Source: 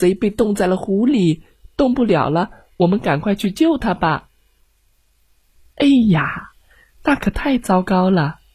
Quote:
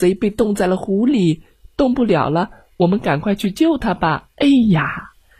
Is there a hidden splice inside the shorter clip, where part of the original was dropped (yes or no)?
yes